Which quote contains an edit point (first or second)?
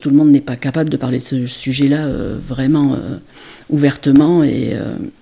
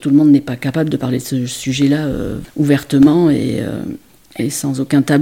second